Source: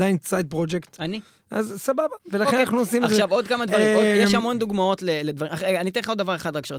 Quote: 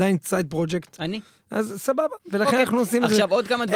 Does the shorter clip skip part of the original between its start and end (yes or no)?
no